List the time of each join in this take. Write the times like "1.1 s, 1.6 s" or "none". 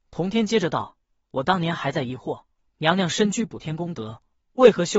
none